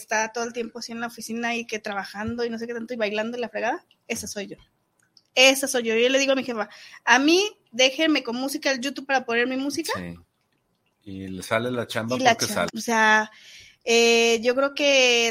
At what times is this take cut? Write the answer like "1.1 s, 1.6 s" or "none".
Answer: 12.7 s